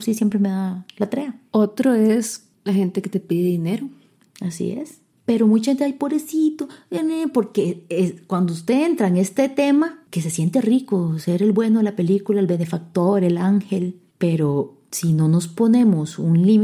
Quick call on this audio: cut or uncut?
cut